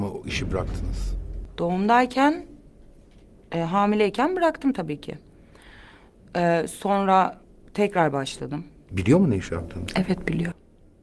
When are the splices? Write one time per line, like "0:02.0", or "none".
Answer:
0:08.9